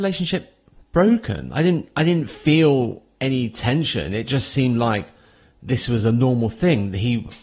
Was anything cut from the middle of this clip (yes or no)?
no